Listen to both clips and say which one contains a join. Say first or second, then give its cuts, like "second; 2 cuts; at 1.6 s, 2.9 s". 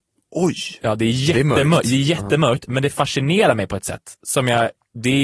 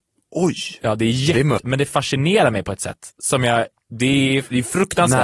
second; 1 cut; at 1.6 s